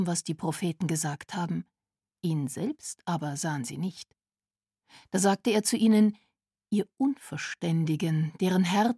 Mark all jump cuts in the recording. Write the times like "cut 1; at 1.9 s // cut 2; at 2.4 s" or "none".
cut 1; at 2.1 s